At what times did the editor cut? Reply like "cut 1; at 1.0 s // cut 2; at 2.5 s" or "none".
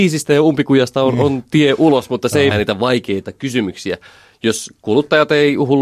cut 1; at 2.5 s